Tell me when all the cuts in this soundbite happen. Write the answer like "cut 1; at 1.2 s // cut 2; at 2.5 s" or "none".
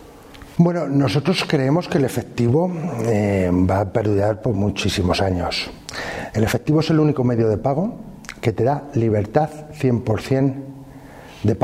cut 1; at 6.3 s